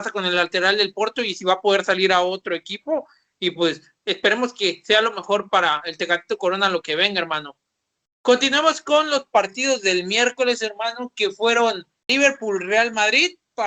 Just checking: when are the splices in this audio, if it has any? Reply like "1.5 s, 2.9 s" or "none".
none